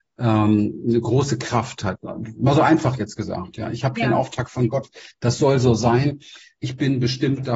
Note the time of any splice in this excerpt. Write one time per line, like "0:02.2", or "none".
0:02.0